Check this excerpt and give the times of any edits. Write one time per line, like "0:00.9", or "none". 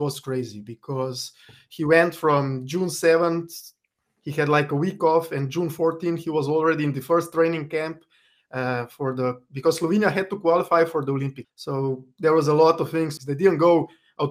0:11.4
0:13.2